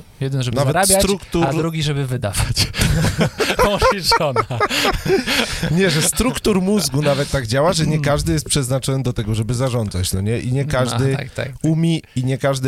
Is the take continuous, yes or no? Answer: yes